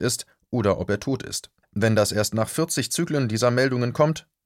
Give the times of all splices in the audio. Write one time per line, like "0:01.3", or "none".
0:01.6